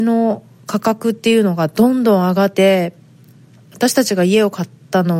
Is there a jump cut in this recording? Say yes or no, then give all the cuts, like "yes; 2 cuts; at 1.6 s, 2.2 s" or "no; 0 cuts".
yes; 1 cut; at 2.5 s